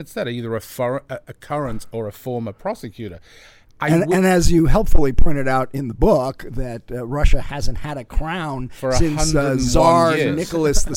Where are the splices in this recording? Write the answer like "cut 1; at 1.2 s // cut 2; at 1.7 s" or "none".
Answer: none